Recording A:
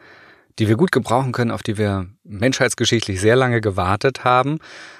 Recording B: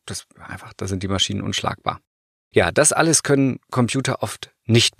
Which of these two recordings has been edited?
B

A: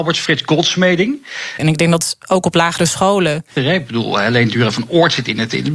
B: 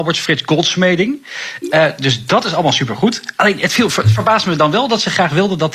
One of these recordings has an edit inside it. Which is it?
A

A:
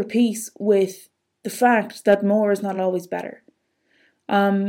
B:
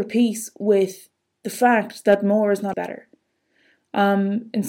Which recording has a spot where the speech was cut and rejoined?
B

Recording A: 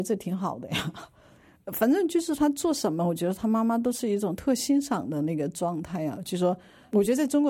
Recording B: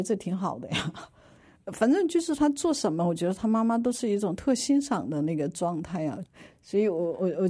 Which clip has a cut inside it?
B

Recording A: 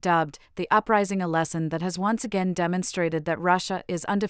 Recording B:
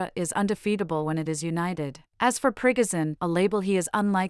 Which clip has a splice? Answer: B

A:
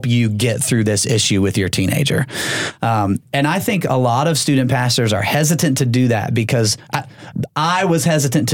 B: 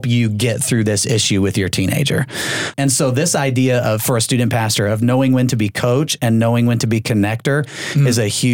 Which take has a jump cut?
B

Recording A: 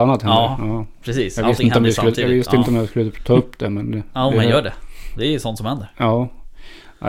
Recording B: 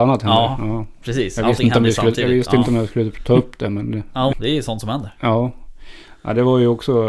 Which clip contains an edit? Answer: B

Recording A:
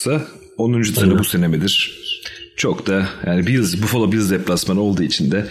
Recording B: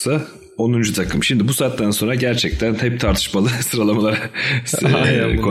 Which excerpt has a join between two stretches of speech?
A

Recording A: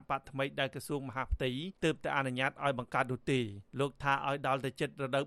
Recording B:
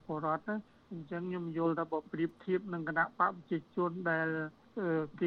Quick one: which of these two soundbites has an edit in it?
A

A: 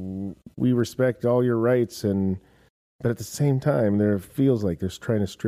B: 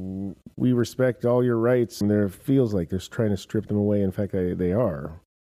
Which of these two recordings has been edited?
B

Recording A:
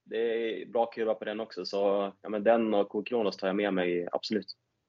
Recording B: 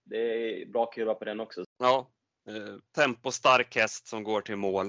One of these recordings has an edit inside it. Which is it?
B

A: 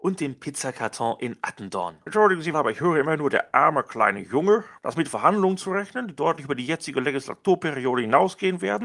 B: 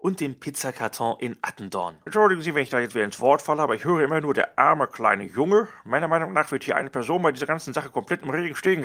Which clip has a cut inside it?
A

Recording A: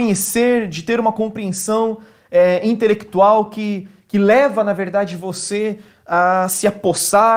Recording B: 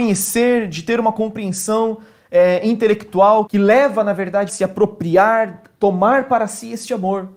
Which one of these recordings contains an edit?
B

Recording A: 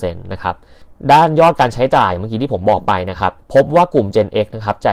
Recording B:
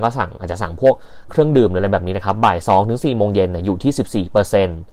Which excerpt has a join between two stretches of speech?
A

